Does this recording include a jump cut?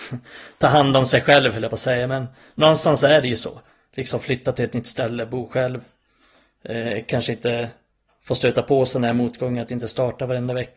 no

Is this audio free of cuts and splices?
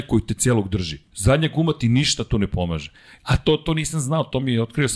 yes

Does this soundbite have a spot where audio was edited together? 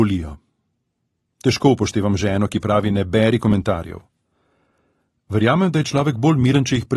no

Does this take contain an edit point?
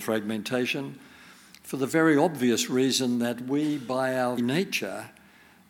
yes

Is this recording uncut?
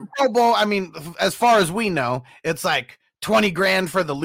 yes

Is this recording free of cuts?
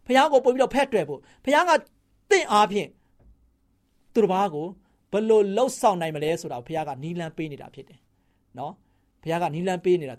yes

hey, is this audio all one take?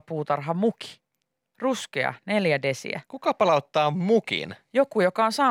yes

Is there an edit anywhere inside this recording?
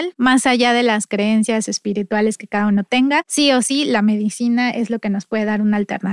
no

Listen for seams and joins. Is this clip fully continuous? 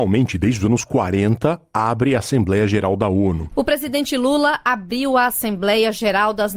no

